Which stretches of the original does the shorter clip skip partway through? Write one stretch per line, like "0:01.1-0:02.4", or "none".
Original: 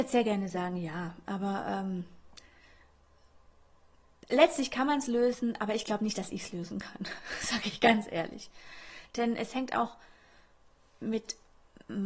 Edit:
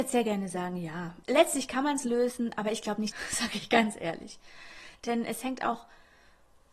0:01.2-0:04.2
0:06.1-0:07.2